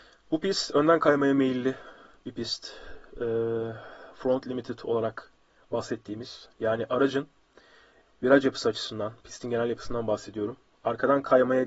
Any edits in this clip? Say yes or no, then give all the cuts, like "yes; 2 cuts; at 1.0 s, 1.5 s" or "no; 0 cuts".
no; 0 cuts